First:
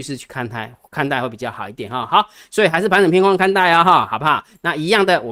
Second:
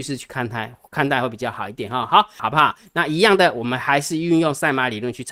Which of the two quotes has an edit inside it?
second; 1 cut; at 2.4 s

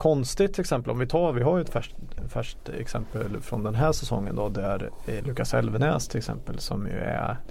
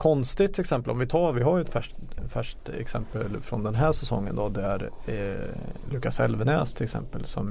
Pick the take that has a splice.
first; 1 cut; at 5.2 s

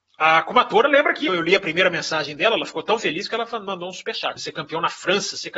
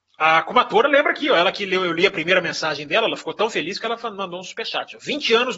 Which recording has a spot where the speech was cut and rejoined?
first; 2 cuts; at 1.3 s, 4.4 s

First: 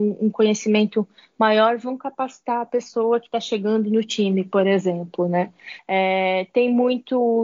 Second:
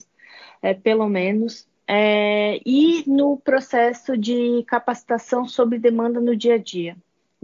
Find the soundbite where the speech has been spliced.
first; 1 cut; at 5.8 s

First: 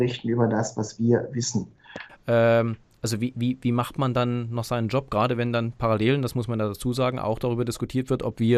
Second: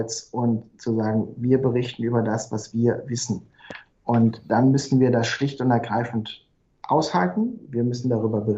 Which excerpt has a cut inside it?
first; 1 cut; at 2.1 s

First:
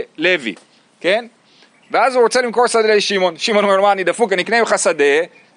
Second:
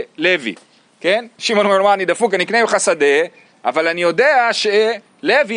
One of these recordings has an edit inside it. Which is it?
second; 1 cut; at 1.4 s

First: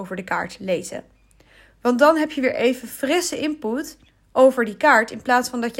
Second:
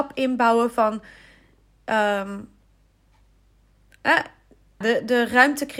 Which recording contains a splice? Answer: second; 1 cut; at 4.8 s

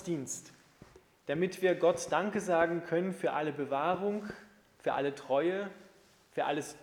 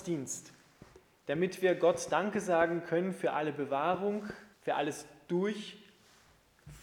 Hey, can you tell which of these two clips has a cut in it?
second; 1 cut; at 4.5 s

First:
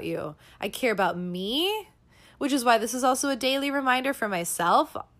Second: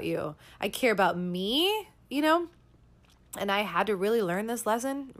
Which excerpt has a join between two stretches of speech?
second; 1 cut; at 2.0 s

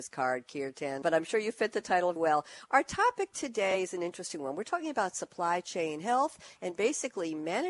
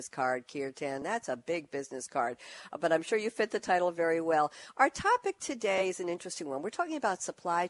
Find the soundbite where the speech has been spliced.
first; 2 cuts; at 1.0 s, 2.2 s

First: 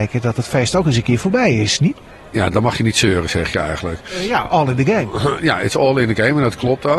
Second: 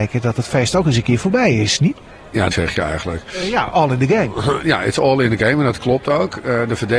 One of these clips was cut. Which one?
second; 1 cut; at 2.5 s

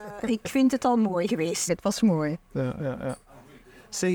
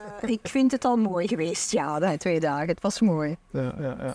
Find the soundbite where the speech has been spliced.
first; 1 cut; at 1.7 s

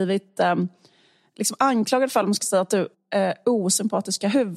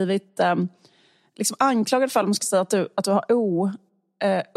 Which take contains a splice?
first; 1 cut; at 2.9 s

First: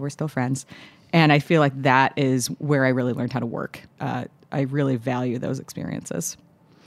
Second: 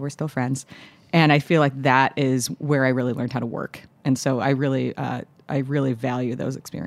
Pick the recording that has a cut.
first; 1 cut; at 4.0 s

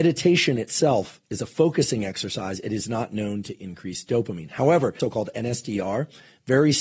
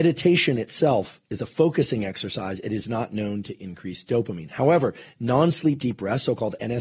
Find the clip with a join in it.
first; 1 cut; at 5.0 s

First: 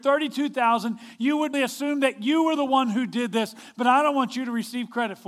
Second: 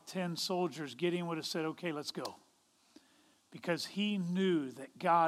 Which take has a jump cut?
first; 1 cut; at 1.5 s

